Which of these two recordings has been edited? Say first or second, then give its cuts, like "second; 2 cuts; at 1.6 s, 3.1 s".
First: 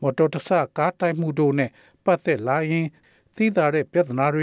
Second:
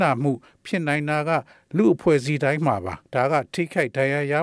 second; 1 cut; at 3.0 s